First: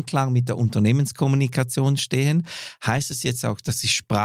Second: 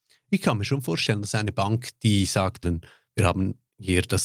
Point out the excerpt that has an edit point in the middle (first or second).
second